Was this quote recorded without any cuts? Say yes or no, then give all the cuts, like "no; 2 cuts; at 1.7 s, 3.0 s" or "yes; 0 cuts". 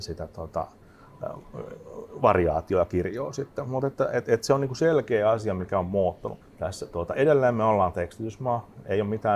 no; 1 cut; at 6.4 s